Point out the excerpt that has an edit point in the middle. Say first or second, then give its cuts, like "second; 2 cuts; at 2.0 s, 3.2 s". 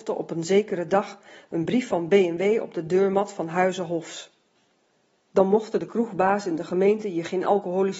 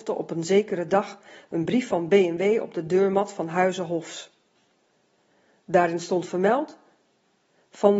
first; 1 cut; at 5.2 s